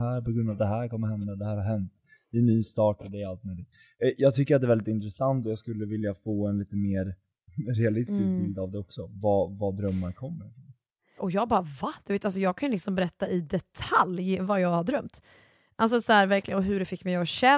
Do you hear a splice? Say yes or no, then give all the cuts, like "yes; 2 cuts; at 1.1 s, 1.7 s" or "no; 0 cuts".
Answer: yes; 1 cut; at 11.2 s